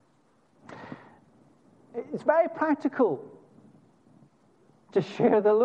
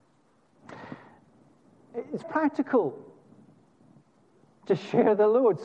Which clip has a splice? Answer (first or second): second